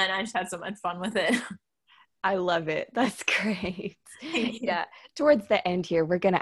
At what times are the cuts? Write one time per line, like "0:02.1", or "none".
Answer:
none